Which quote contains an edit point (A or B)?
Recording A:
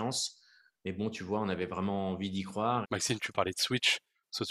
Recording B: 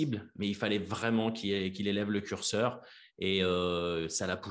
A